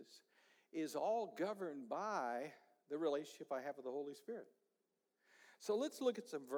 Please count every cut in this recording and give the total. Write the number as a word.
zero